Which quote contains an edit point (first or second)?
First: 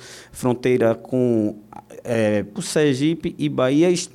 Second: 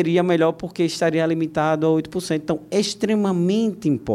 first